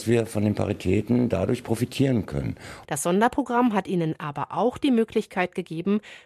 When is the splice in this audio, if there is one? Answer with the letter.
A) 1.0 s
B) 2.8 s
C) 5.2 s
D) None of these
B